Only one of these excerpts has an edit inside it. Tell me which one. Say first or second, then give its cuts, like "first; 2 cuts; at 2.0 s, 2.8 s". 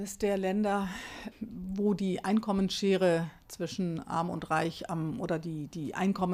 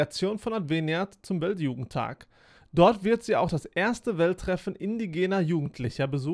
first; 1 cut; at 1.3 s